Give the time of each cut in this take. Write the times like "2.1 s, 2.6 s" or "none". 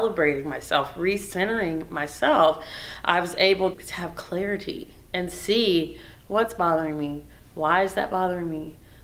3.7 s